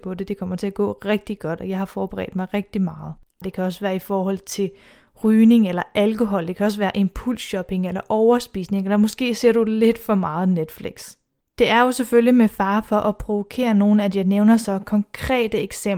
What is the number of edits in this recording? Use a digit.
1